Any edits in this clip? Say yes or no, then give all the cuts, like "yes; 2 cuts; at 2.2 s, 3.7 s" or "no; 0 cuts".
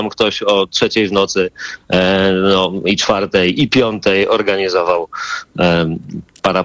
no; 0 cuts